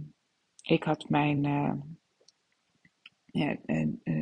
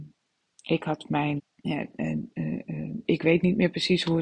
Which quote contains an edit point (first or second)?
second